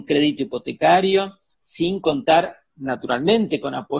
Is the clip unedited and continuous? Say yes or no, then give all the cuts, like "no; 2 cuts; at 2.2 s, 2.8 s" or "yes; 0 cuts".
yes; 0 cuts